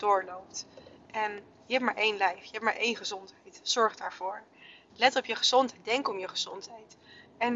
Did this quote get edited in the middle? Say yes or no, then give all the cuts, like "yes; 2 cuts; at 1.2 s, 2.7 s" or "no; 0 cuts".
yes; 1 cut; at 4.9 s